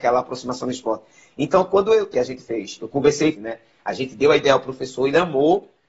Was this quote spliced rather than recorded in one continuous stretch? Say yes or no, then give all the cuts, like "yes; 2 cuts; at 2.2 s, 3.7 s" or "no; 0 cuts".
yes; 2 cuts; at 2.1 s, 3.3 s